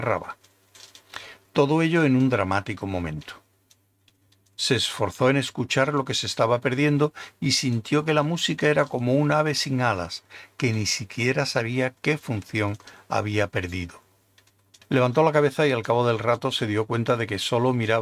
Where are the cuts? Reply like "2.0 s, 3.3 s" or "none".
14.8 s